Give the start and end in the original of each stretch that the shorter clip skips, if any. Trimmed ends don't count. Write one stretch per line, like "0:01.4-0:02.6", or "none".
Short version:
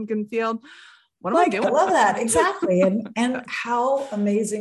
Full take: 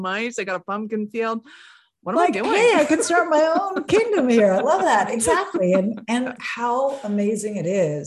0:02.4-0:04.5